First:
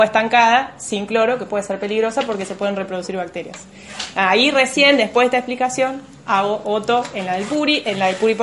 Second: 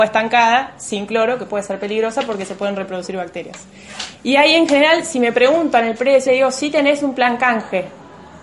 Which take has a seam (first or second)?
second